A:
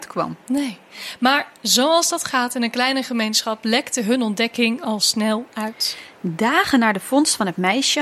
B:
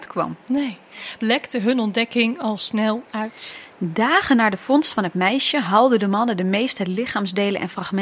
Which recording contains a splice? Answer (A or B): B